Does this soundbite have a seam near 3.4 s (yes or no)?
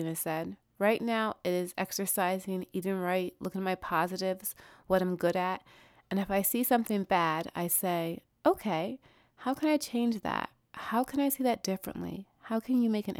no